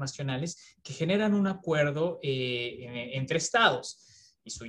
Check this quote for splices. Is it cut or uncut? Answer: uncut